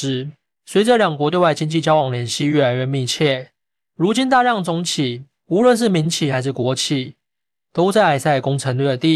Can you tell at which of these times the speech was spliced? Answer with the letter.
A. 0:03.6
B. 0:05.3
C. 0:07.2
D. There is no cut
D